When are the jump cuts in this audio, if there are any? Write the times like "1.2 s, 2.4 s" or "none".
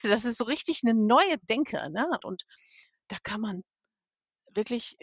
2.2 s